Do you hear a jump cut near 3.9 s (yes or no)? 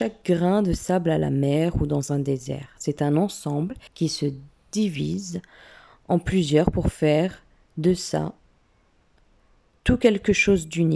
yes